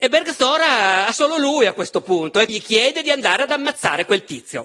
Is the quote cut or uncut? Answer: cut